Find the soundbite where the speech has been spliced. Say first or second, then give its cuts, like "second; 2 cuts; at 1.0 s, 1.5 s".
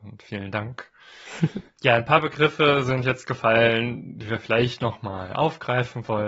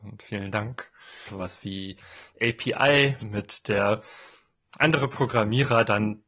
second; 2 cuts; at 1.3 s, 3.2 s